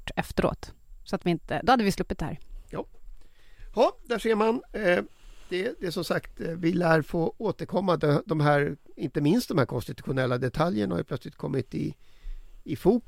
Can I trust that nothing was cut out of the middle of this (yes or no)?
yes